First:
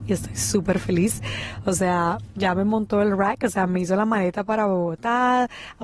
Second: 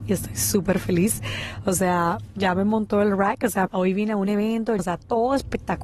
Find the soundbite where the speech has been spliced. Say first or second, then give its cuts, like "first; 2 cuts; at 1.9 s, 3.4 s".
second; 2 cuts; at 3.7 s, 4.8 s